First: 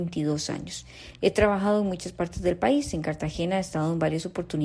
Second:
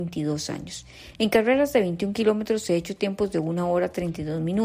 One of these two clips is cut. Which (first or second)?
second